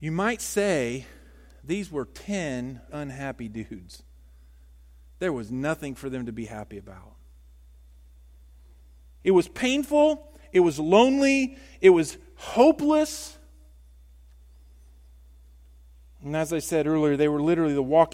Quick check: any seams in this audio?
yes; 2 cuts; at 2.9 s, 9.2 s

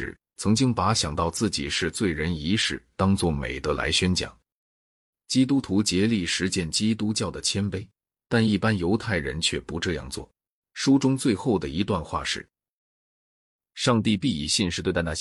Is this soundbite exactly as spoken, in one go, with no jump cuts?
no; 1 cut; at 10.6 s

